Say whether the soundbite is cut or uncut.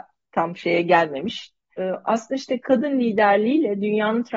cut